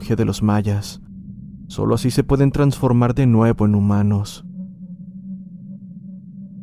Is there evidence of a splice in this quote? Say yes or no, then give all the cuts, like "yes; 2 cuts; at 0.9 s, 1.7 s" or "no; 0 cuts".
yes; 1 cut; at 1.7 s